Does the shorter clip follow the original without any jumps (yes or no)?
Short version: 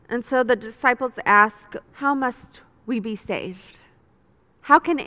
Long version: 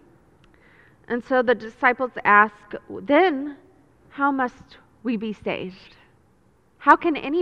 no